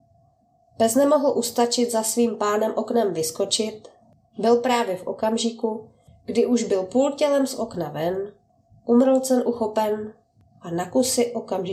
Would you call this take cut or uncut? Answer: uncut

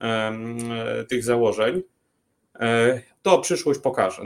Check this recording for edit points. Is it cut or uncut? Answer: cut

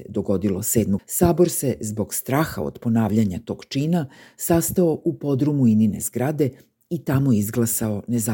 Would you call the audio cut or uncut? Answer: cut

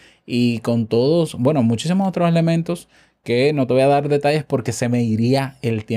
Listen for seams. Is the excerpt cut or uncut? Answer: uncut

